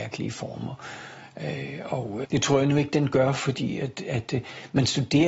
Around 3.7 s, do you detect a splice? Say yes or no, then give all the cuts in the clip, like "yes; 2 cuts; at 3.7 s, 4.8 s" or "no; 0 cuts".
no; 1 cut; at 2.2 s